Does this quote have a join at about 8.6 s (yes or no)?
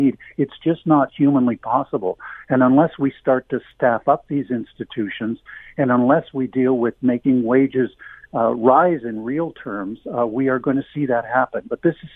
no